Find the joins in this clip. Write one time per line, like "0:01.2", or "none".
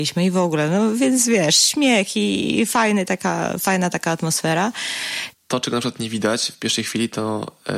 0:05.3